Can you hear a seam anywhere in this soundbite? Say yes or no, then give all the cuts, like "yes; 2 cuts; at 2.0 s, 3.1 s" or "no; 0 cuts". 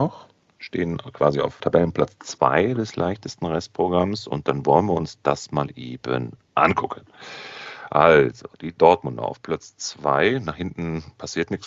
yes; 1 cut; at 1.6 s